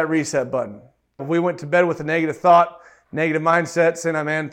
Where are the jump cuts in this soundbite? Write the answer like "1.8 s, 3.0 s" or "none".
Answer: 1.2 s